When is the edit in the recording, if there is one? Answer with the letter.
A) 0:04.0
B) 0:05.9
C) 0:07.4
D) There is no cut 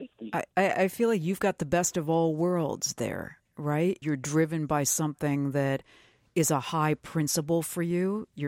A